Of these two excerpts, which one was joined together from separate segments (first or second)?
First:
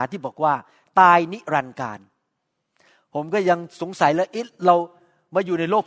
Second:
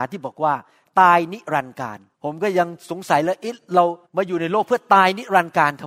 second